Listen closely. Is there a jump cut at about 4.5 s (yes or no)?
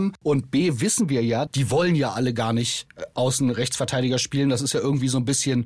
no